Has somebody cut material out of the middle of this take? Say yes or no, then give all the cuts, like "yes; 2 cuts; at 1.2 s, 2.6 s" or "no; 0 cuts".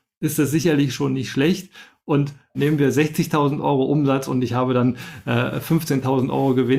no; 0 cuts